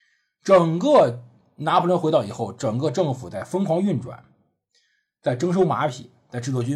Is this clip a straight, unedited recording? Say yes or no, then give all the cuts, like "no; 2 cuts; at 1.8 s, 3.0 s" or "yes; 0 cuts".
yes; 0 cuts